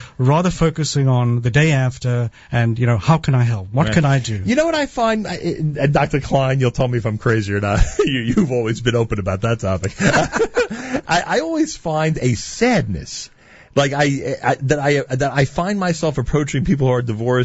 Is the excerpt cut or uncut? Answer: uncut